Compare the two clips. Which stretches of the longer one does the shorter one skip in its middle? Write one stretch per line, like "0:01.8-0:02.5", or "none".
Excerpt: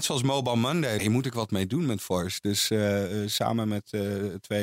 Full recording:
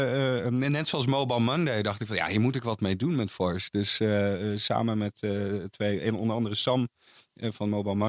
0:01.8-0:02.3